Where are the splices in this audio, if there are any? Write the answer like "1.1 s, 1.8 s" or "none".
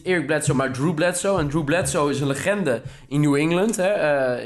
none